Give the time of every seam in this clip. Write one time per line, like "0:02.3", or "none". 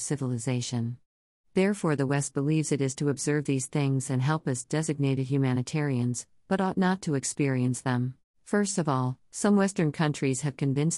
0:08.3

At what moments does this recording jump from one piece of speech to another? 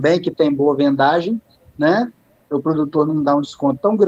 none

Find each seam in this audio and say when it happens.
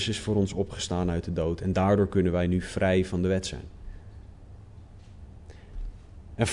none

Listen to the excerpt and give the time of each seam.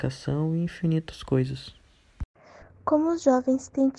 none

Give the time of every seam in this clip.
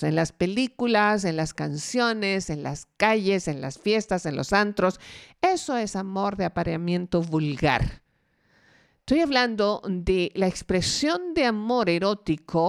none

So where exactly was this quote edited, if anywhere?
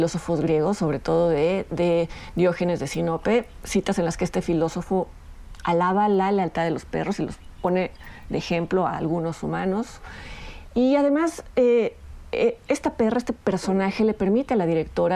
0:10.7

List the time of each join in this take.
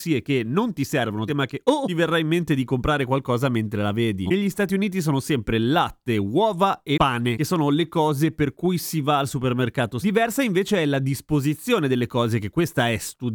0:01.3
0:04.3
0:10.0

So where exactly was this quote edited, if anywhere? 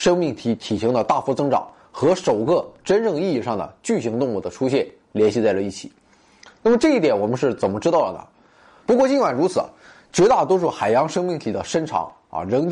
0:08.8

